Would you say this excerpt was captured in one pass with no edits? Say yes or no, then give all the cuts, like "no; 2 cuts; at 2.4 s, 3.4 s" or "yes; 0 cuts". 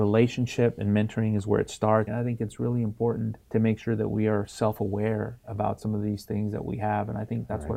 no; 2 cuts; at 2.1 s, 3.4 s